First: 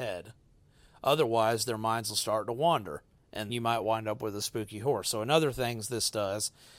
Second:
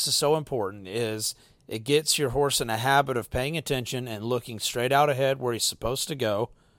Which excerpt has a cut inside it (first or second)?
first